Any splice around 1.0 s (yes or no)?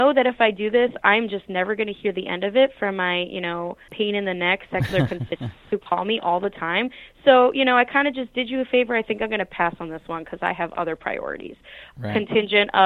no